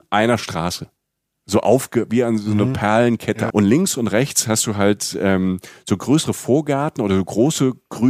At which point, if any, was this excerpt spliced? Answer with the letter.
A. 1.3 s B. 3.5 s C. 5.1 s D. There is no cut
B